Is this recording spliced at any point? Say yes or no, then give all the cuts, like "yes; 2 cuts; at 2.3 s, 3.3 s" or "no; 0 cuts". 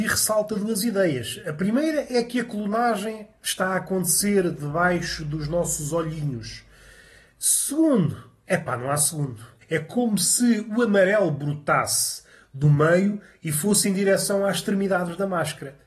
yes; 1 cut; at 9.6 s